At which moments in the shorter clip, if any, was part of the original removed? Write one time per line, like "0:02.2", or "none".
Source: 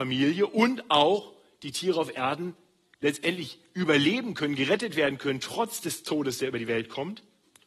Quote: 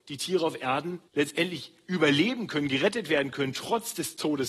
0:01.1